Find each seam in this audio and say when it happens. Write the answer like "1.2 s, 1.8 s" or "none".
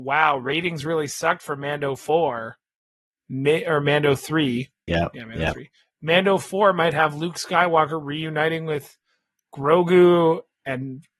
4.9 s